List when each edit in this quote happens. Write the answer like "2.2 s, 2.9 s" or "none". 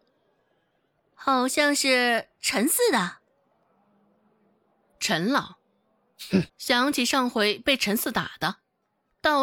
6.5 s